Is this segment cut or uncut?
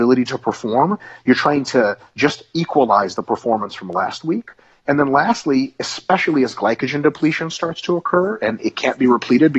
uncut